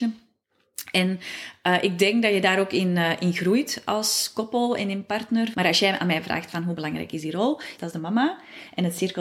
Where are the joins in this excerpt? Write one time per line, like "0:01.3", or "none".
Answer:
0:05.5
0:07.8